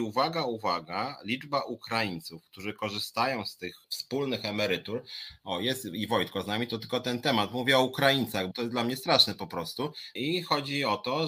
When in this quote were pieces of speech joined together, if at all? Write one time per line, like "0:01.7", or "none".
0:03.8
0:08.5
0:10.2